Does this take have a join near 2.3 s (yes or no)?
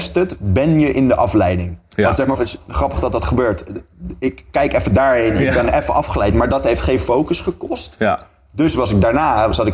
yes